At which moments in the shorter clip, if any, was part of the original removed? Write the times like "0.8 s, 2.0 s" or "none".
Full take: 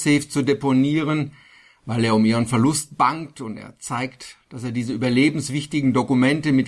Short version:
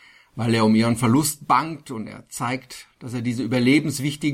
none